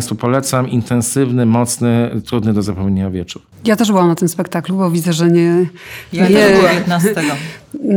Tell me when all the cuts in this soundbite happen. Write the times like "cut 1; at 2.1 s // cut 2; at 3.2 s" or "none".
cut 1; at 3.5 s